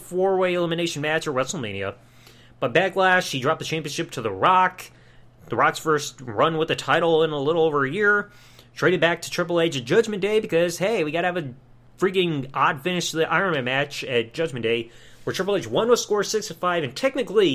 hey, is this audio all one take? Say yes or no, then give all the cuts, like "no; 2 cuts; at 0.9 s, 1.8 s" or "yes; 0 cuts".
yes; 0 cuts